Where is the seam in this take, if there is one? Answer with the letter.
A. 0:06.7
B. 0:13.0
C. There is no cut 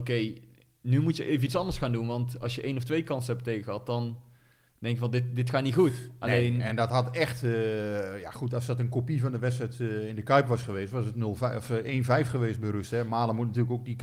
C